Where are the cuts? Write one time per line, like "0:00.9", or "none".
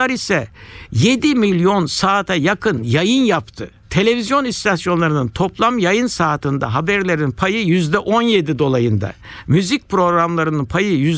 0:09.4